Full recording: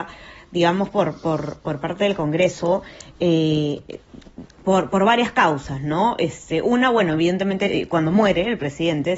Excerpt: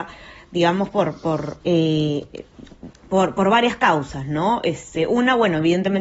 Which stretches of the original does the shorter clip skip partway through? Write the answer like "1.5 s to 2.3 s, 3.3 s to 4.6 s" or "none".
1.6 s to 3.2 s